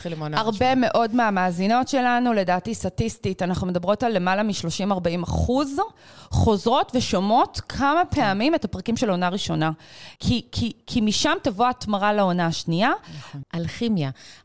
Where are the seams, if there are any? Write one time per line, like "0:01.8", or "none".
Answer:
0:10.2
0:13.4